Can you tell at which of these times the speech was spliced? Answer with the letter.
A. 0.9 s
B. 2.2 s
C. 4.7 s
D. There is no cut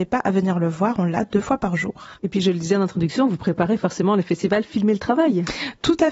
B